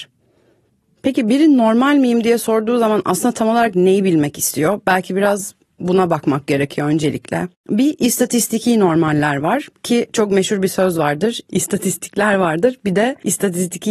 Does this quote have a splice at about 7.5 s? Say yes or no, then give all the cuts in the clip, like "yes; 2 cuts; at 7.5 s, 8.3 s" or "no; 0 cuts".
yes; 1 cut; at 7.5 s